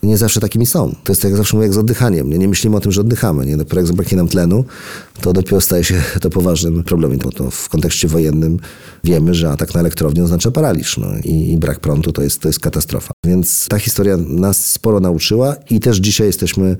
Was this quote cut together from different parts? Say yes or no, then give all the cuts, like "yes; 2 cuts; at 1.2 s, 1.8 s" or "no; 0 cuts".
yes; 1 cut; at 7.2 s